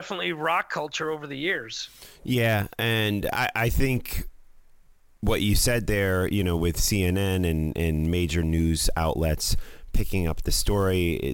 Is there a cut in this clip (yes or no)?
no